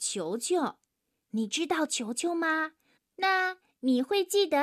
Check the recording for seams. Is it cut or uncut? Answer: cut